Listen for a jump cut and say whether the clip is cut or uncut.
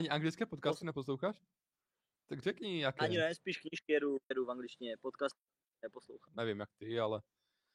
cut